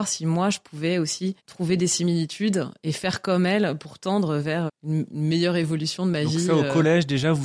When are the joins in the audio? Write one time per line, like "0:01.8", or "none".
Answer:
0:01.4
0:04.7